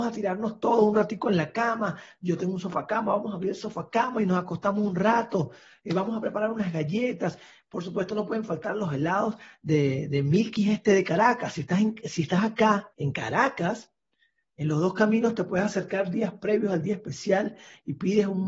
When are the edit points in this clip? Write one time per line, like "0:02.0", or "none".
0:12.9